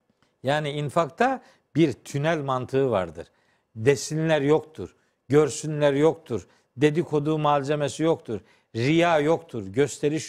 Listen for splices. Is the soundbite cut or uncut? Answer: uncut